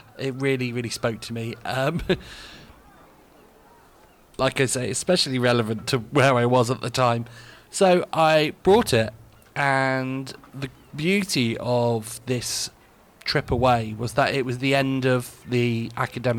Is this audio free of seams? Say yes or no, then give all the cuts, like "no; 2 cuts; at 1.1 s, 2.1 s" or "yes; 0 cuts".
yes; 0 cuts